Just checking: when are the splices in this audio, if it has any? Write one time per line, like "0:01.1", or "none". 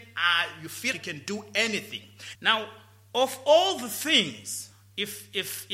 0:00.9
0:02.3